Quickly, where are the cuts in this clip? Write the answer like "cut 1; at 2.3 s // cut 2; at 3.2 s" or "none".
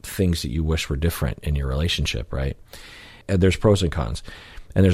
cut 1; at 3.2 s